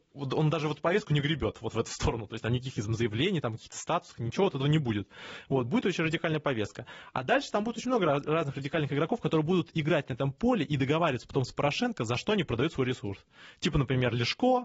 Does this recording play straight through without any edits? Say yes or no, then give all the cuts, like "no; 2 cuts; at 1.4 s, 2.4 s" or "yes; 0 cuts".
yes; 0 cuts